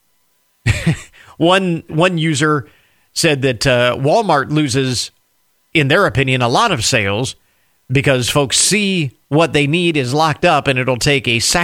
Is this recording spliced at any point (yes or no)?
yes